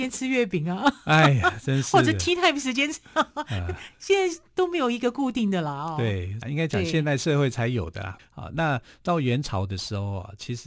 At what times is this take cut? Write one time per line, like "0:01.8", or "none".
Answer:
0:06.4
0:08.2